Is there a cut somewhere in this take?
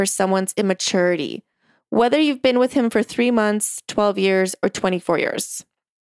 no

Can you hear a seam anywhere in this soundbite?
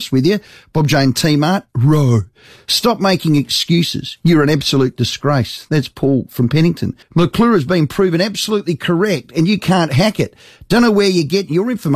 yes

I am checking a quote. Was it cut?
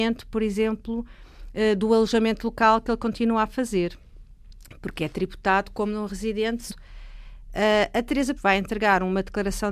yes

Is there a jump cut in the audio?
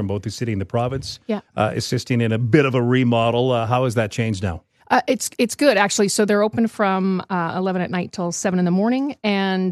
no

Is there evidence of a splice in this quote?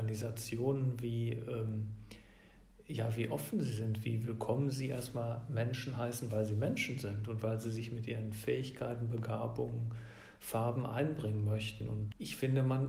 no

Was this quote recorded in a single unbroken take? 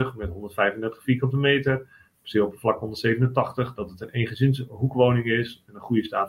yes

